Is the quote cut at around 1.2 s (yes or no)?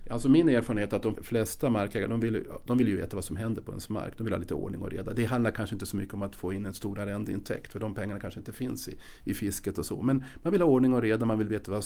yes